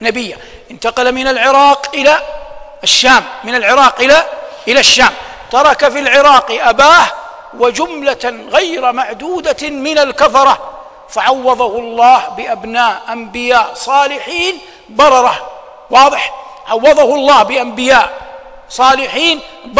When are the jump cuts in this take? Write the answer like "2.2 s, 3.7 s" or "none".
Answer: none